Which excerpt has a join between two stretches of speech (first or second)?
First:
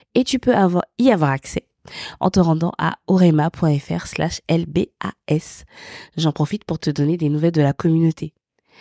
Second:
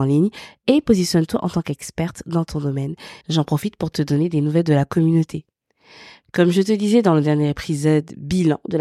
second